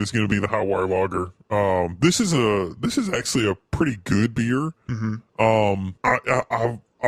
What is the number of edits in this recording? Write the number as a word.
one